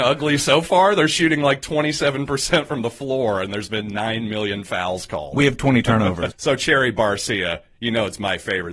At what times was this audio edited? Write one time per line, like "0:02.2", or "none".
0:06.3